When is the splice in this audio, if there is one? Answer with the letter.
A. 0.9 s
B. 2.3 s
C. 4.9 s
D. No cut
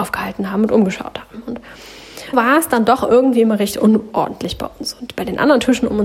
B